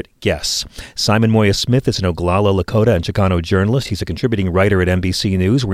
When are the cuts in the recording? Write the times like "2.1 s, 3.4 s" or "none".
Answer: none